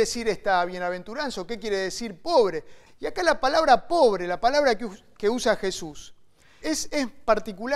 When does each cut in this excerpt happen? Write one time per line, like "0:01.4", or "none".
0:02.9
0:06.6